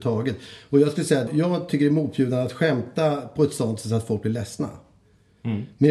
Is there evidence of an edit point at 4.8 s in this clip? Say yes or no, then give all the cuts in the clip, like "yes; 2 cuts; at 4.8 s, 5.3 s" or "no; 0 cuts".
no; 1 cut; at 1.3 s